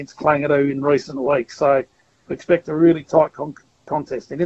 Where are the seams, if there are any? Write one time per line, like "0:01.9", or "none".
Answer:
none